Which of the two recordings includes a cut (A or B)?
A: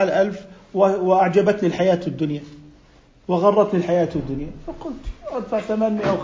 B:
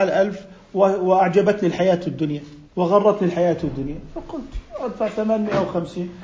B